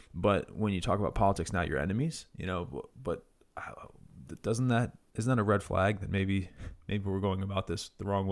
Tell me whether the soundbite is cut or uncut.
uncut